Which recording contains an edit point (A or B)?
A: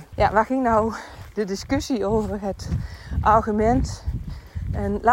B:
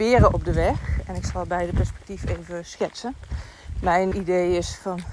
B